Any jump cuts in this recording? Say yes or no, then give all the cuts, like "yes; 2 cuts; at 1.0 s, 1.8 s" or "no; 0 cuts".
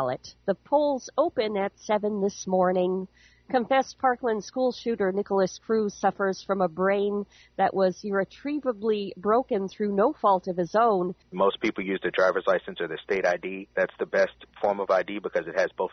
yes; 1 cut; at 11.2 s